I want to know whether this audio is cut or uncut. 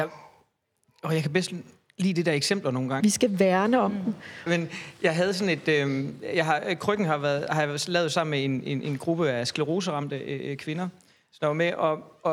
cut